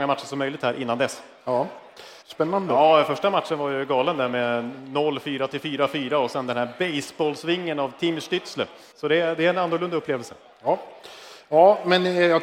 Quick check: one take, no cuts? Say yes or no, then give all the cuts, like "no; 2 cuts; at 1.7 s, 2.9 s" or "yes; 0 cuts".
no; 2 cuts; at 2.2 s, 8.9 s